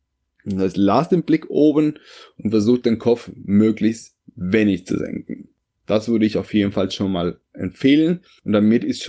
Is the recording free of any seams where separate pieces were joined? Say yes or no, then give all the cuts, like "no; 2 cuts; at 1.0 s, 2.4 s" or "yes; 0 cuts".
yes; 0 cuts